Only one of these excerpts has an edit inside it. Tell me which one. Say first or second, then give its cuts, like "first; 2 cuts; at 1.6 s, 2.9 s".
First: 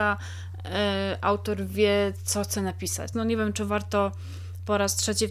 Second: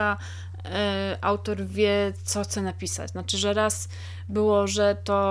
first; 1 cut; at 3.1 s